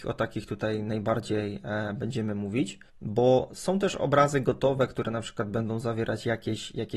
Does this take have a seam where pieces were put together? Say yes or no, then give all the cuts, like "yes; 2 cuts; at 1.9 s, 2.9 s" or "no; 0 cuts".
yes; 1 cut; at 2.9 s